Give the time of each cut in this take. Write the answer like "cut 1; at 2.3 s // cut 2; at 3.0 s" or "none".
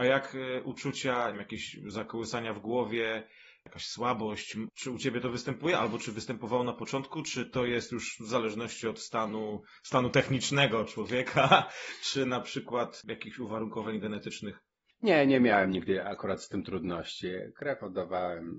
cut 1; at 4.7 s